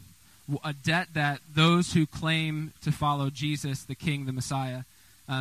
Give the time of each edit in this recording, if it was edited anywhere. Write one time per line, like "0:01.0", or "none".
none